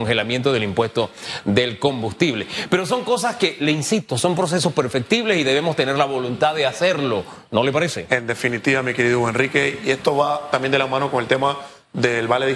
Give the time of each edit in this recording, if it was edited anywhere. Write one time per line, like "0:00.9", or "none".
none